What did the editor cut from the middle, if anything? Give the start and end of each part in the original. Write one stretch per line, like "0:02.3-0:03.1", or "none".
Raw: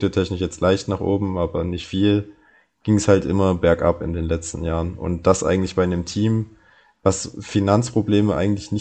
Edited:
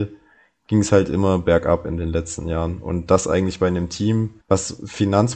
0:06.6-0:06.9